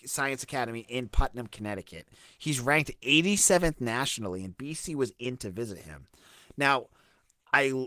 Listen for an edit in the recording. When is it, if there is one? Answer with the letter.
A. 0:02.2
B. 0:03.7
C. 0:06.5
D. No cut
D